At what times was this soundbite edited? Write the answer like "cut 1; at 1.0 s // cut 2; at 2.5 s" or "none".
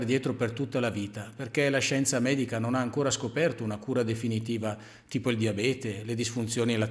none